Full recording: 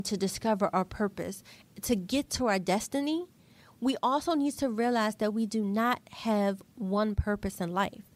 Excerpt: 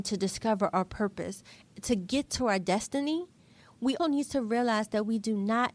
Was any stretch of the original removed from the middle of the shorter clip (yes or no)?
yes